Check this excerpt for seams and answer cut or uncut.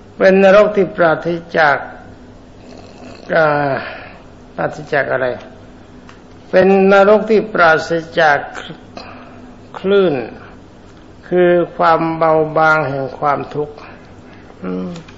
uncut